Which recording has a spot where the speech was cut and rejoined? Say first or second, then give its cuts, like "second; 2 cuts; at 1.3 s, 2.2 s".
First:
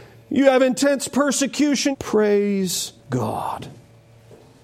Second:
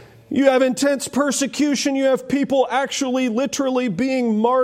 first; 2 cuts; at 1.9 s, 3.0 s